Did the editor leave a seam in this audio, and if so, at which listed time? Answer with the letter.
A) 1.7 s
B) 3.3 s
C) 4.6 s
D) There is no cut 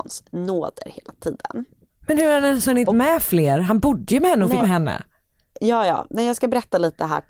C